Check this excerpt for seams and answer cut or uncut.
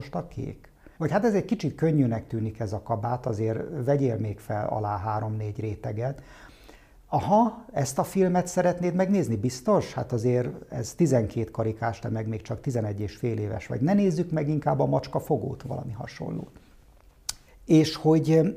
cut